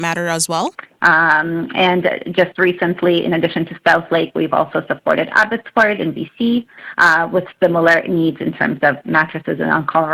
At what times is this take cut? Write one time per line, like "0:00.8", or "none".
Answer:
0:01.0